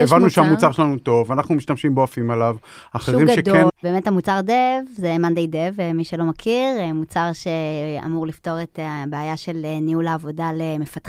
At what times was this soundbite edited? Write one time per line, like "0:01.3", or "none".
0:03.7